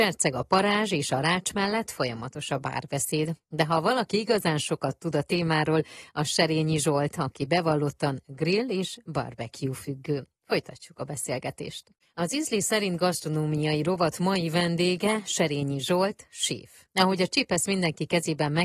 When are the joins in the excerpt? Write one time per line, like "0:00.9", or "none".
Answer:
0:03.4
0:12.0
0:16.9